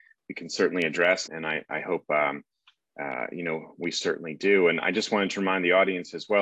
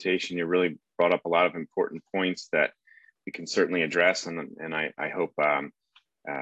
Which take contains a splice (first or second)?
first